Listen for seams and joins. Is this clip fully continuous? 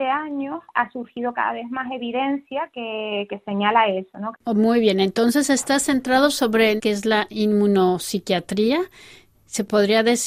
no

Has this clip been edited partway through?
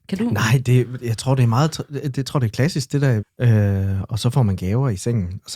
yes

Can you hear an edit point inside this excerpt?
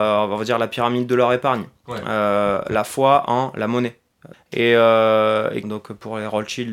yes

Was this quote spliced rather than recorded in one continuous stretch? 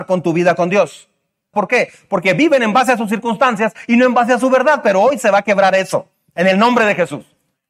yes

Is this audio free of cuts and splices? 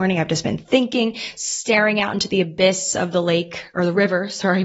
yes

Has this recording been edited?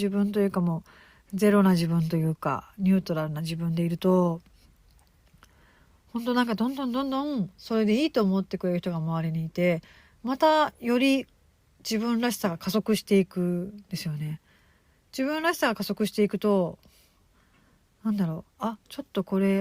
no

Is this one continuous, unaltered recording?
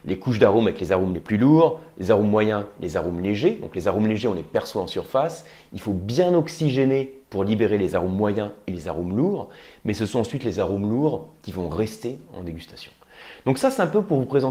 yes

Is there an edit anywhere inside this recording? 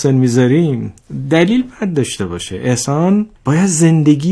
yes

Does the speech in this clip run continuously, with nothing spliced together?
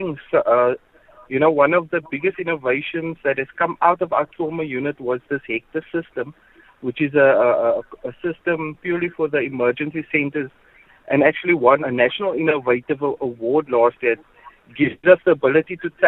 no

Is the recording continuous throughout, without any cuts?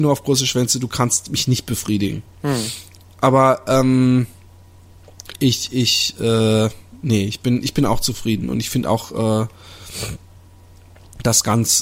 yes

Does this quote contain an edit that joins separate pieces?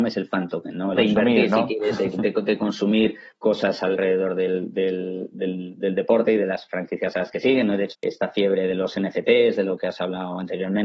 yes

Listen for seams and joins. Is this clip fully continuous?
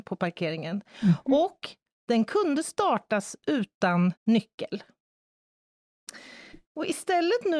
no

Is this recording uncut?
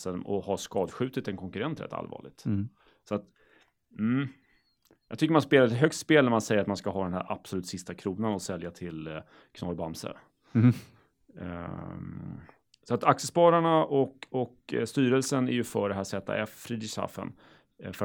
yes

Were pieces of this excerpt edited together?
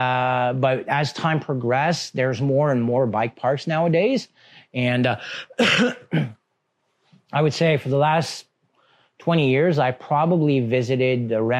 no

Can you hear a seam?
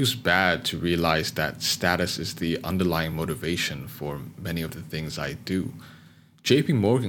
no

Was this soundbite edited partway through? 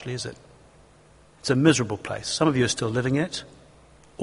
yes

